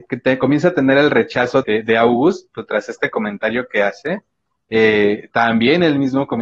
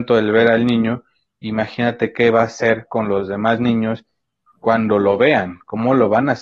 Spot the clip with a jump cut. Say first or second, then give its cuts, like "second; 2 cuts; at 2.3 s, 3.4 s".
first; 1 cut; at 1.6 s